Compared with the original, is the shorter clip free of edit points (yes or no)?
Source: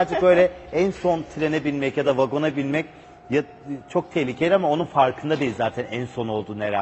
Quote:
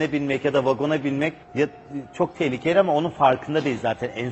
no